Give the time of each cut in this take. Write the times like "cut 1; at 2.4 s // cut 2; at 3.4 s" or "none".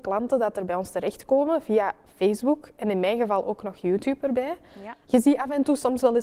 cut 1; at 5.0 s